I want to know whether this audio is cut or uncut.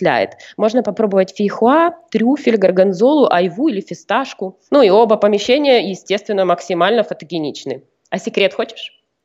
cut